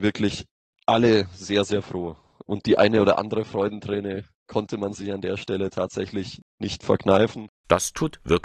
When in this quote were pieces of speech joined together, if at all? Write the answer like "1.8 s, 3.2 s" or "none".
none